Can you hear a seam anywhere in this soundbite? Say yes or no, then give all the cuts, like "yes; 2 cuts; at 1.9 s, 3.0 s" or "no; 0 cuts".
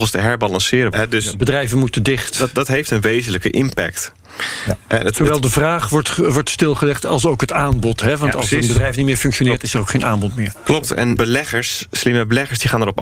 yes; 2 cuts; at 0.9 s, 11.2 s